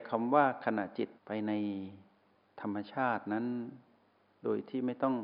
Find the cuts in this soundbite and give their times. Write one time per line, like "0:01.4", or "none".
0:01.2